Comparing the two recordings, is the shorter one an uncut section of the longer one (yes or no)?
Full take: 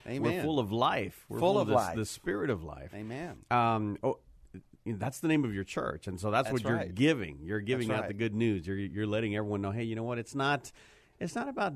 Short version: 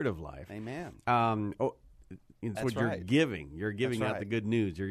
no